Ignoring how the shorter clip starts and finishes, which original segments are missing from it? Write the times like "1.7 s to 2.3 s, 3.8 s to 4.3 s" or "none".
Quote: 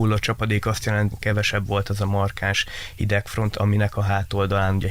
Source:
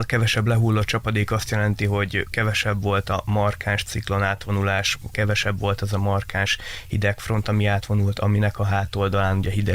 1.8 s to 5.0 s, 7.5 s to 8.2 s